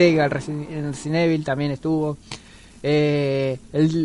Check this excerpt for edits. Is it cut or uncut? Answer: uncut